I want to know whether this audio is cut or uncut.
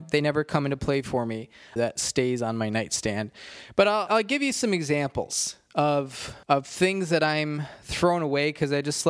cut